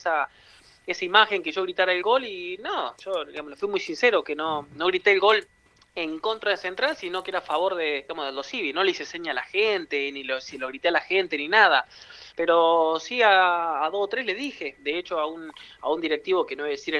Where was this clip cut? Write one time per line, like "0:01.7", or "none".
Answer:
none